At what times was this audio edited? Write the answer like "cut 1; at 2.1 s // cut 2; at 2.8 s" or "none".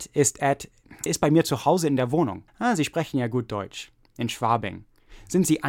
cut 1; at 1.1 s // cut 2; at 2.5 s // cut 3; at 4.1 s